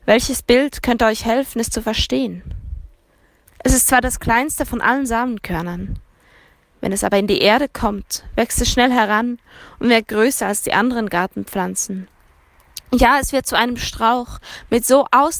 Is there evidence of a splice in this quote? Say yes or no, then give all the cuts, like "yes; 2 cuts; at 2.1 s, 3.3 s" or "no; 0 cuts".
yes; 1 cut; at 3.5 s